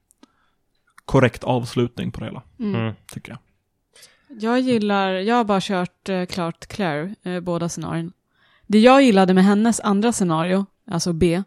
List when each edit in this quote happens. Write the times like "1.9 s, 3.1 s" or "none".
none